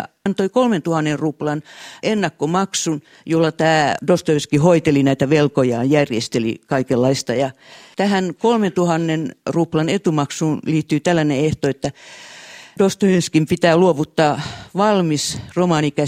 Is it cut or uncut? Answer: uncut